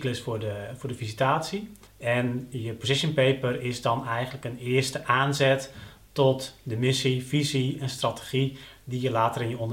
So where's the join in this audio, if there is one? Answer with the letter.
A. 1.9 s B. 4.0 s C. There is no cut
A